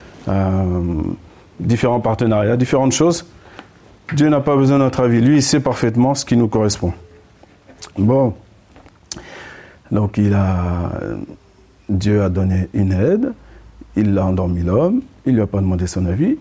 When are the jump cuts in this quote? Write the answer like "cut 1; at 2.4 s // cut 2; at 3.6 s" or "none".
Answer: cut 1; at 7.9 s